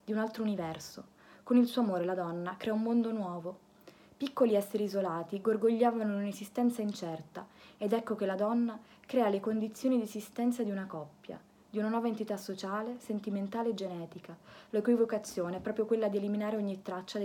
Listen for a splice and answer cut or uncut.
uncut